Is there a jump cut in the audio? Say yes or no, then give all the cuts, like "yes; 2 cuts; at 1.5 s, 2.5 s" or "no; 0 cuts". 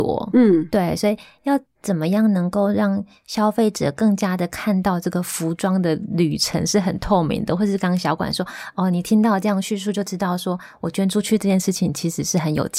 no; 0 cuts